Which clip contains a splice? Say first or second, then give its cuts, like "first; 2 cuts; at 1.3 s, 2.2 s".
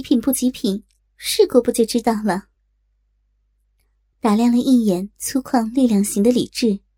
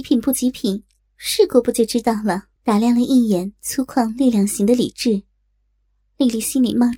second; 1 cut; at 2.5 s